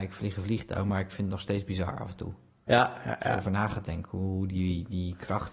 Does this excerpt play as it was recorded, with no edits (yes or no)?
yes